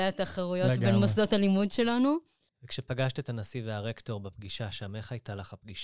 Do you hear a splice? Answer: yes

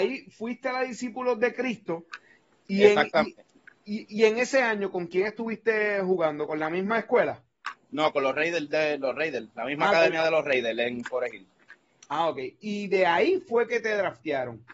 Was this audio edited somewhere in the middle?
no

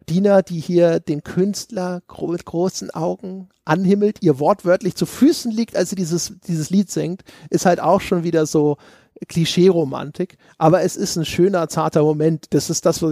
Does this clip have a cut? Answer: no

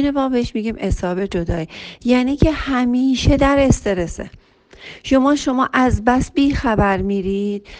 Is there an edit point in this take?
no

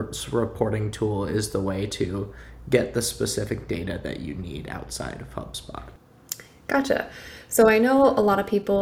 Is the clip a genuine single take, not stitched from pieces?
yes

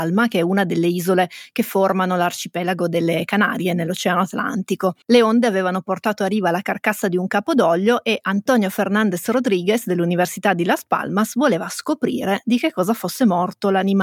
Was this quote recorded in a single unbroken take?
no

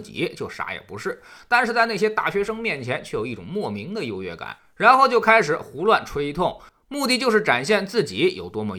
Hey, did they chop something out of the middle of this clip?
no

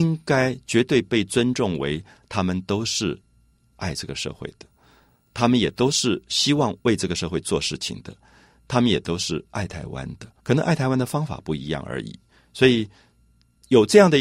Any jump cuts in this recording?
yes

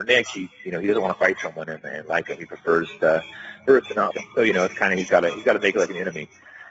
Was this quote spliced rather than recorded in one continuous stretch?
yes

